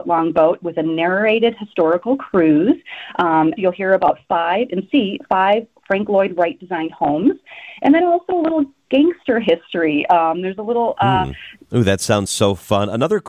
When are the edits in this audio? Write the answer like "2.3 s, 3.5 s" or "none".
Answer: 3.6 s, 11.7 s